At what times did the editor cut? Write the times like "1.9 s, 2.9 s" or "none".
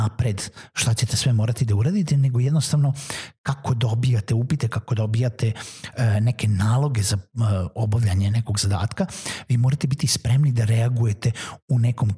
4.7 s